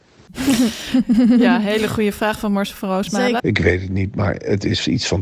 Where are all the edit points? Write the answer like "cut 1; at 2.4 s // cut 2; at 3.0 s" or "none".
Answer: cut 1; at 3.4 s